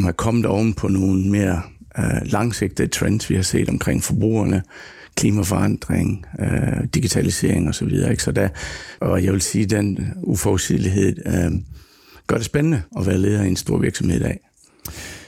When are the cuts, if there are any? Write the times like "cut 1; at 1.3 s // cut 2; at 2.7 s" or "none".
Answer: cut 1; at 9.0 s // cut 2; at 12.9 s

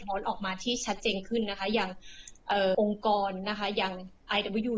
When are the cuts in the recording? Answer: cut 1; at 2.7 s

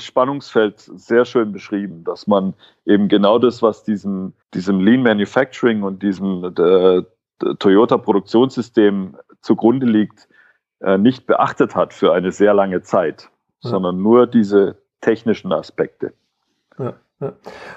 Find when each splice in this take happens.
cut 1; at 4.4 s

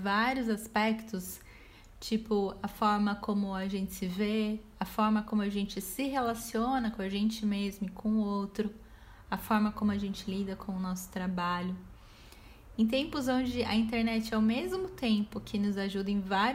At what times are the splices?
none

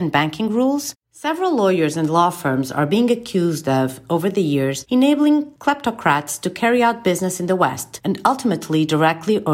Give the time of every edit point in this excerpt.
cut 1; at 0.9 s // cut 2; at 8.0 s

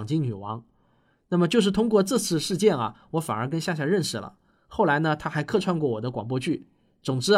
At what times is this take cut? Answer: none

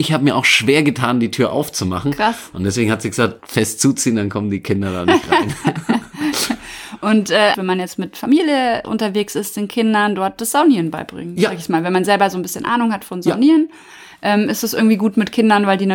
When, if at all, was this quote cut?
cut 1; at 3.4 s // cut 2; at 7.5 s

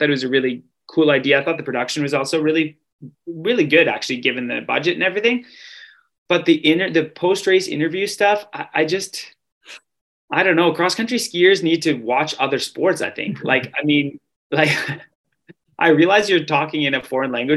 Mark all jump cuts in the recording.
none

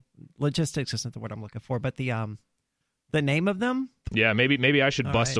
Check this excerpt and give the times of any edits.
cut 1; at 4.0 s

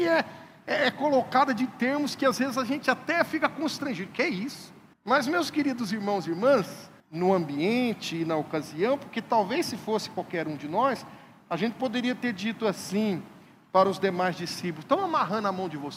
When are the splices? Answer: cut 1; at 4.9 s // cut 2; at 7.0 s

